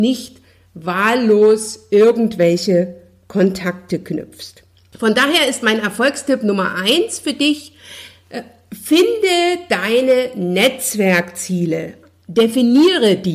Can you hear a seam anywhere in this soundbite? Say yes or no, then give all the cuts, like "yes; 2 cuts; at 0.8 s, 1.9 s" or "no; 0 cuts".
no; 0 cuts